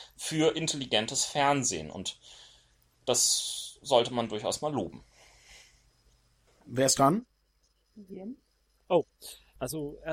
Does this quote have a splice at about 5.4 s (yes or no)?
no